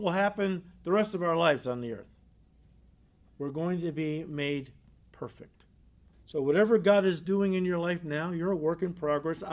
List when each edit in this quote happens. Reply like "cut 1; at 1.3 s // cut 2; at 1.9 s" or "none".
cut 1; at 3.2 s // cut 2; at 6.1 s